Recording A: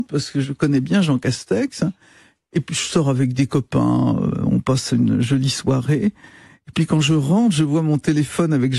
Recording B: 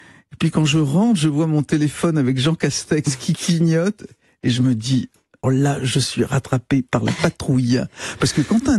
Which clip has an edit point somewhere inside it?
B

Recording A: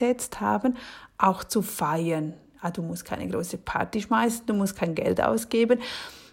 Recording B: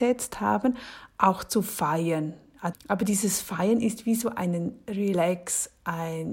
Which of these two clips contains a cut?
B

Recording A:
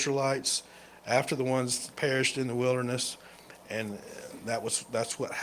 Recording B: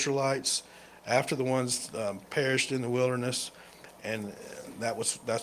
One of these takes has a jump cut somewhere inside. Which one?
A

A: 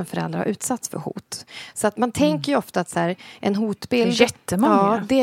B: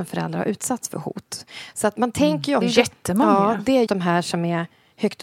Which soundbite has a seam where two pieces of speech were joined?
B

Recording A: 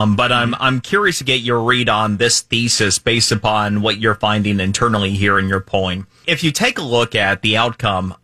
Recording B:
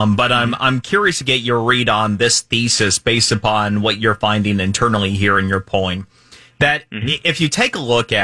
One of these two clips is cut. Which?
A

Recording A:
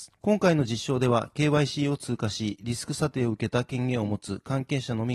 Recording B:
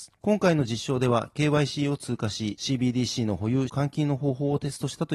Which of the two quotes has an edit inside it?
B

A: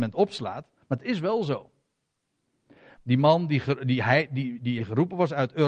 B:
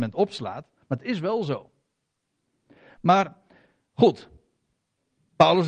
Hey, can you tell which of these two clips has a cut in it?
A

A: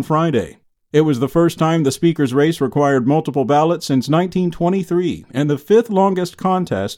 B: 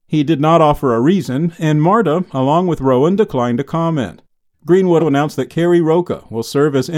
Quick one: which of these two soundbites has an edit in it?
B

